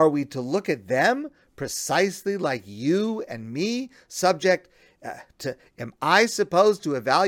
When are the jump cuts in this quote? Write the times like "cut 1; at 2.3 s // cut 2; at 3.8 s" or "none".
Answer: none

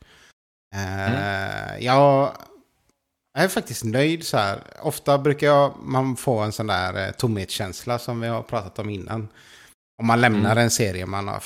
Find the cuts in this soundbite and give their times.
none

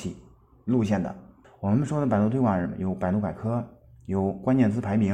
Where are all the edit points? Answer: cut 1; at 1.4 s

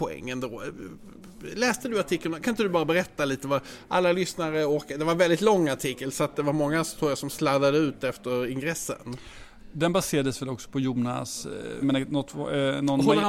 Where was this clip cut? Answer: cut 1; at 11.8 s

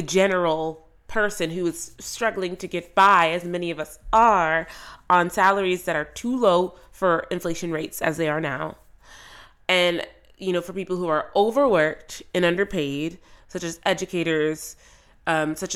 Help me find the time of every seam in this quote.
none

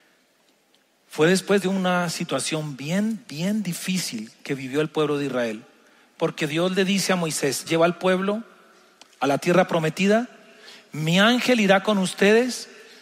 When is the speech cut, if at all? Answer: cut 1; at 7.7 s

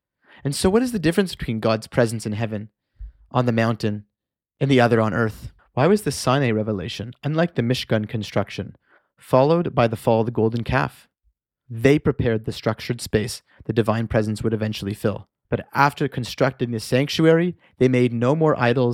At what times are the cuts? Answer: cut 1; at 11.7 s // cut 2; at 15.4 s

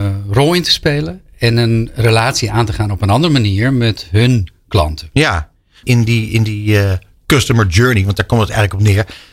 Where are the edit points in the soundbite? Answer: cut 1; at 5.8 s

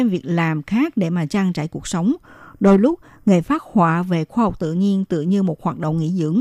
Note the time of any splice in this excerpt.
none

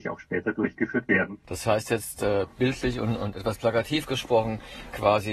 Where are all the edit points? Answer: none

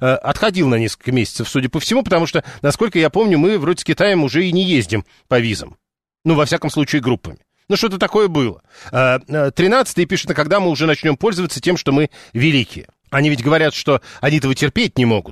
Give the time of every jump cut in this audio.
cut 1; at 10.3 s // cut 2; at 13.0 s

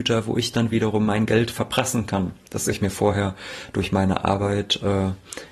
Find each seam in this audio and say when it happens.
none

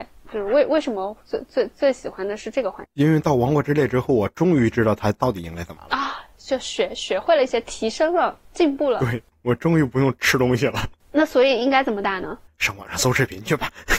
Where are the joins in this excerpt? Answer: none

